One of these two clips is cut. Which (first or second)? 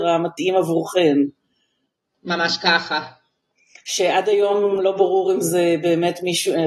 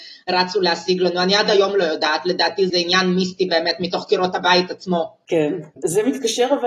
second